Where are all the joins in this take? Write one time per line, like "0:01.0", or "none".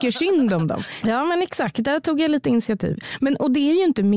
0:01.0